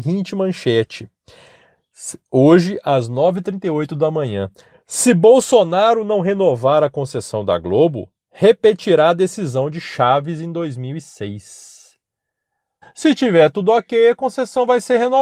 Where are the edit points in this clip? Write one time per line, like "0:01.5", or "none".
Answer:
0:12.8